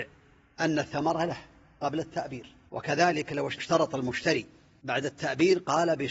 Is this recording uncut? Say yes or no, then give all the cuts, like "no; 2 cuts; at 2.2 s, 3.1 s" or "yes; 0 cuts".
yes; 0 cuts